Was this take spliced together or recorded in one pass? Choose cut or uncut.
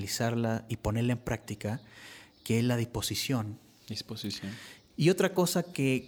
cut